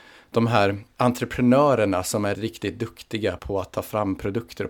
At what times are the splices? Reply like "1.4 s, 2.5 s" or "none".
2.3 s, 3.4 s